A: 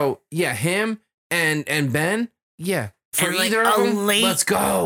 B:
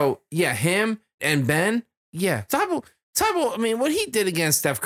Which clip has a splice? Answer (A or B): B